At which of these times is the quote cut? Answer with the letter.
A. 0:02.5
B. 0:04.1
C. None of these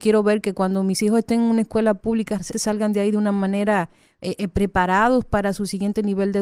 A